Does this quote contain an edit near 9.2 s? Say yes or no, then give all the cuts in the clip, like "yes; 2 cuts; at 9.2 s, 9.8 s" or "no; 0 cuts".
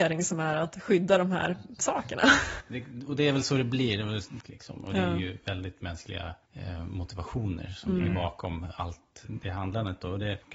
no; 3 cuts; at 2.6 s, 4.4 s, 6.4 s